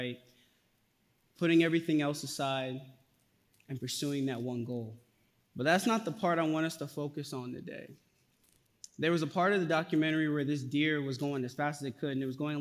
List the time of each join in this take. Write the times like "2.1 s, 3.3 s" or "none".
5.4 s